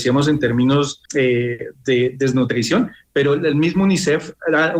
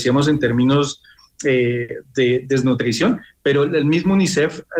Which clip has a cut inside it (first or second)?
first